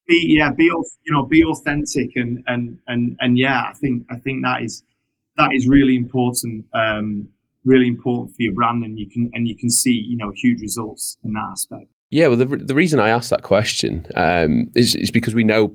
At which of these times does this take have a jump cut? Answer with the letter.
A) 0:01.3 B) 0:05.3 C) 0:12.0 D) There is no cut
D